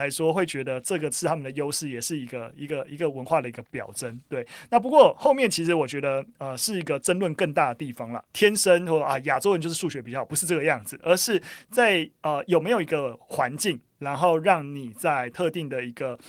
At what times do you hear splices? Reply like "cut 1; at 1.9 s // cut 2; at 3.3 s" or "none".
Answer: cut 1; at 8.3 s